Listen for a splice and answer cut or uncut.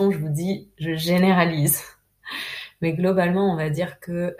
uncut